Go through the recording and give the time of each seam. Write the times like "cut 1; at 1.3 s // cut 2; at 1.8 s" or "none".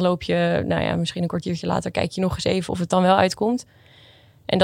cut 1; at 2.7 s